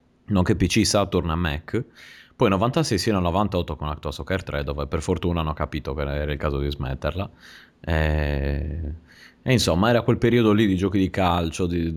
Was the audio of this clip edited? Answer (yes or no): no